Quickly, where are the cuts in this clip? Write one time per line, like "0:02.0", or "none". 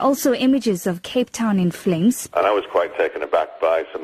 0:02.3

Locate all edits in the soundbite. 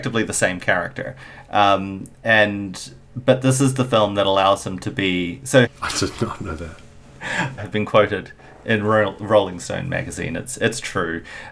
0:05.6
0:07.6

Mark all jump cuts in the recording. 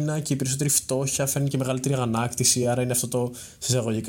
none

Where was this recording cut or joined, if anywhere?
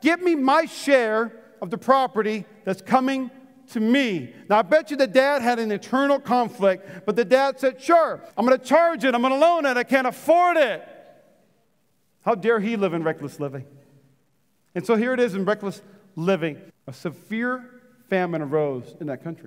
0:08.3
0:16.7

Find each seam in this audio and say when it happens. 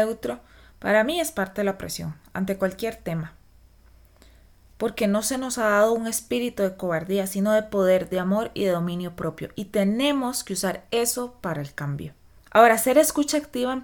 none

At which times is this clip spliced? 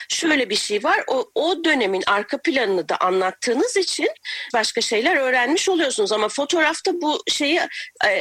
none

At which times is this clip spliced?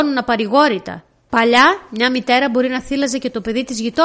0:01.3

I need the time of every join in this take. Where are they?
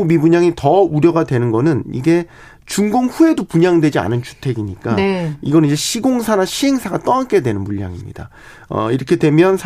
none

